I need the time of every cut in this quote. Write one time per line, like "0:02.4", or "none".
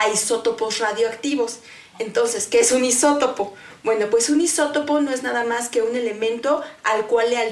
none